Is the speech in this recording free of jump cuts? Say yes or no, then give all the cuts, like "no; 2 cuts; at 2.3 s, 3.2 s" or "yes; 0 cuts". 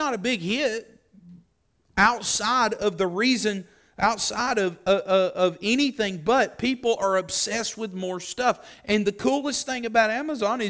yes; 0 cuts